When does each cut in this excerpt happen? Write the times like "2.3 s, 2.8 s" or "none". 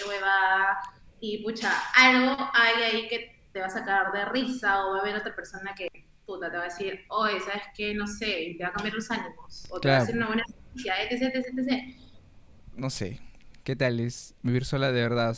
12.7 s